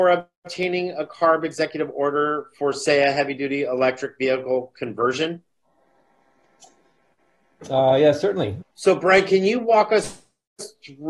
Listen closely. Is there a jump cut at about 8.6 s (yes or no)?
yes